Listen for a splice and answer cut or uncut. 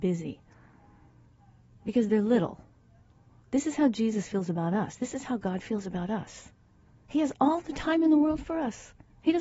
uncut